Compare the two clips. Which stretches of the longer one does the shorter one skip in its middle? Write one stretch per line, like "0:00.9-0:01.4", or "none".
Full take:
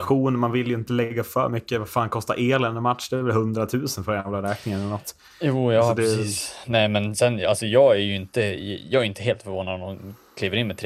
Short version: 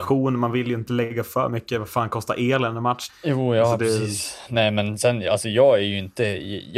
0:03.1-0:05.3